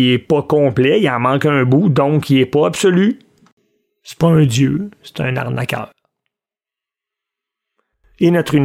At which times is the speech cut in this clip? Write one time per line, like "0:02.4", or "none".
none